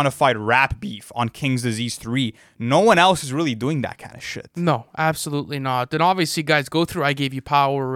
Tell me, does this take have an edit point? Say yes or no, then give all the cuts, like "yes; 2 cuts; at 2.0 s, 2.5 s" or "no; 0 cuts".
no; 0 cuts